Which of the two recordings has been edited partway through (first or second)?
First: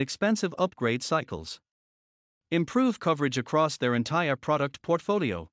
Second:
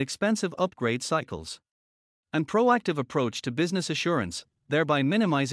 second